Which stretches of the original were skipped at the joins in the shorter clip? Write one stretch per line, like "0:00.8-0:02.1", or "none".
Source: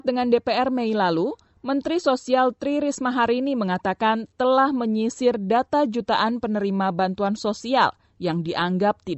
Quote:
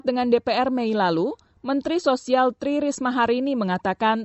none